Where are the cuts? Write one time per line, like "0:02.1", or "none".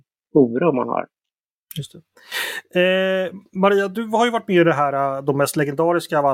none